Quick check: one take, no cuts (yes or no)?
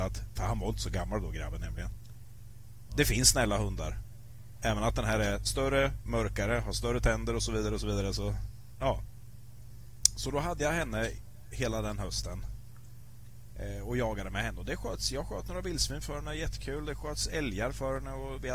yes